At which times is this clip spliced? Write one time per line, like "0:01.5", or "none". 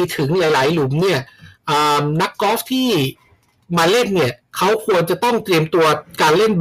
0:04.4